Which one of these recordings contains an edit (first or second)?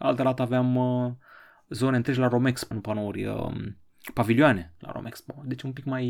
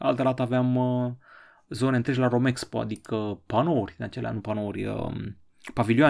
first